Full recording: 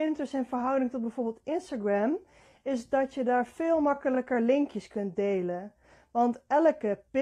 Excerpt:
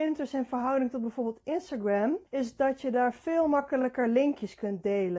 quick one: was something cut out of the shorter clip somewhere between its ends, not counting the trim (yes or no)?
yes